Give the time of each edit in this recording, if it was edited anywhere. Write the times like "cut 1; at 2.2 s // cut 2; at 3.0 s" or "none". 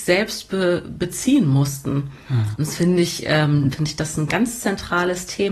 cut 1; at 2.5 s // cut 2; at 3.7 s